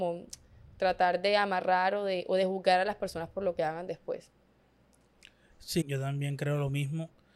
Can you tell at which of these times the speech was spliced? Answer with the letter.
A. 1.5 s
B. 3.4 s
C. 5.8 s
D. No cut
C